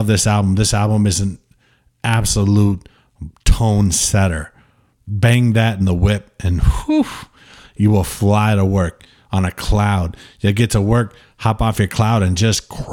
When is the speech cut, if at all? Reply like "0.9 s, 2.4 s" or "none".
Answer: none